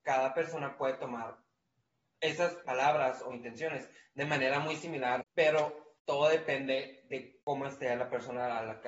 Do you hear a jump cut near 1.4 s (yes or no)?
no